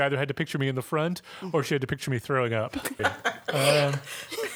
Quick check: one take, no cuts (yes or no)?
no